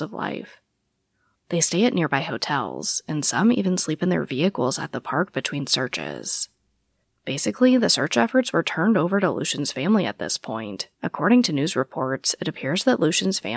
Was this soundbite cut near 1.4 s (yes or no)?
no